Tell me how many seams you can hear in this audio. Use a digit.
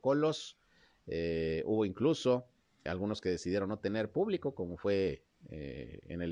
1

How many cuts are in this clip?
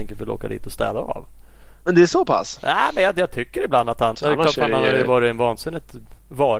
1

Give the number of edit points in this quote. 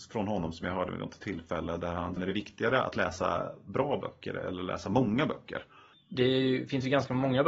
2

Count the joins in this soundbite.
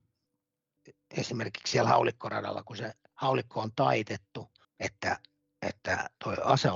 1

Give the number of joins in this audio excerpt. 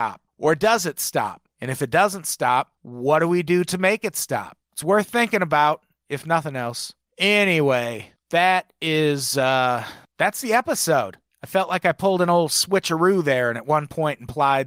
0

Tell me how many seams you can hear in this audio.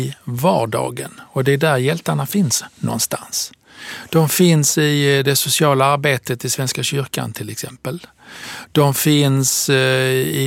0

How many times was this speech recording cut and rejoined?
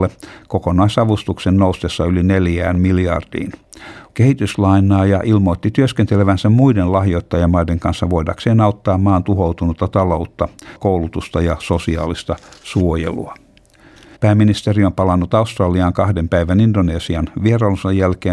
3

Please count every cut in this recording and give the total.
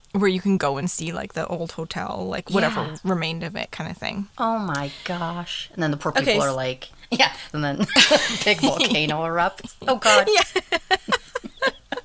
2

